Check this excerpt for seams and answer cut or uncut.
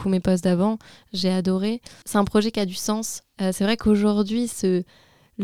cut